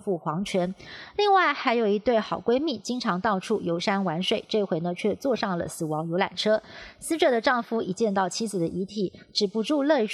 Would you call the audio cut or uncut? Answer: uncut